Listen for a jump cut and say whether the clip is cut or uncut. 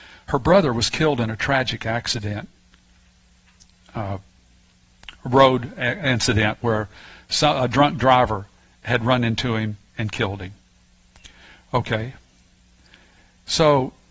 uncut